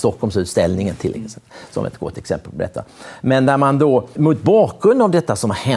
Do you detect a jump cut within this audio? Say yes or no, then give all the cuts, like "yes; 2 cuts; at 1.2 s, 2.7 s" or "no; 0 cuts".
yes; 1 cut; at 4.2 s